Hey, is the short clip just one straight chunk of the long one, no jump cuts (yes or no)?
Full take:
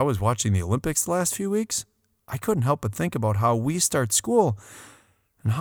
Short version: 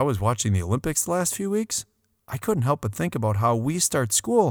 yes